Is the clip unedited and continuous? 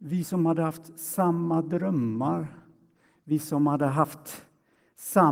yes; 0 cuts

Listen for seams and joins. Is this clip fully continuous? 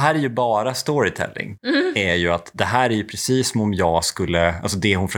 no; 1 cut; at 1.6 s

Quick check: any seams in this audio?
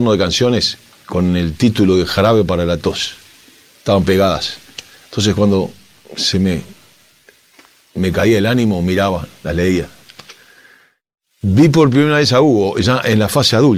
no; 0 cuts

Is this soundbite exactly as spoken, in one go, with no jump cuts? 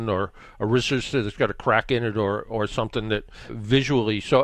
no; 1 cut; at 3.5 s

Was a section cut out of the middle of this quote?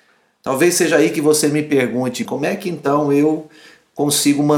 yes; 1 cut; at 2.2 s

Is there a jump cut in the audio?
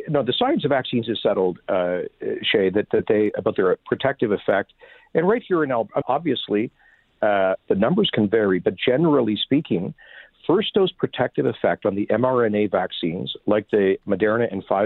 yes; 2 cuts; at 6.0 s, 7.7 s

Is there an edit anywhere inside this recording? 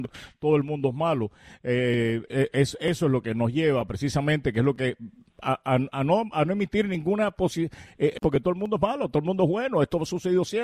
yes; 2 cuts; at 2.3 s, 8.2 s

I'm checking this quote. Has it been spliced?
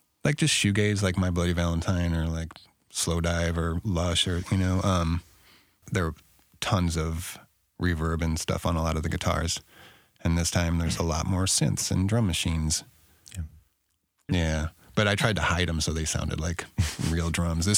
yes; 2 cuts; at 5.8 s, 14.3 s

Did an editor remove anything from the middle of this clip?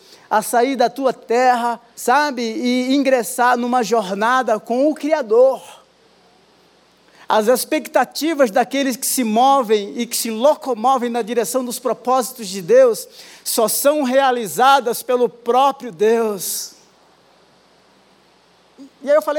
yes; 1 cut; at 1.9 s

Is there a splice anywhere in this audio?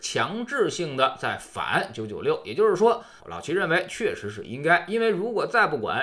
yes; 1 cut; at 3.2 s

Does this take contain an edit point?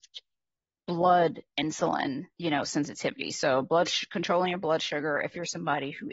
yes; 1 cut; at 2.3 s

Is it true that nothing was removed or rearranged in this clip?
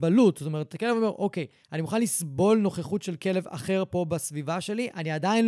yes; 0 cuts

